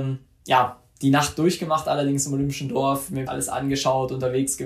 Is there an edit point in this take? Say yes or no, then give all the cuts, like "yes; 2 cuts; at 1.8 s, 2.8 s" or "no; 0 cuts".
yes; 1 cut; at 3.3 s